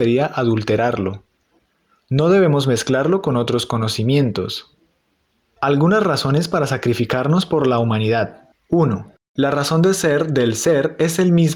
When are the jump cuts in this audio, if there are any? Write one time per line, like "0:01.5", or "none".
none